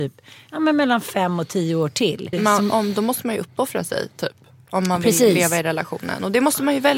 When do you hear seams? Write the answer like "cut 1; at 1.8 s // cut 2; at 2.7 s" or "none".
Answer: cut 1; at 2.3 s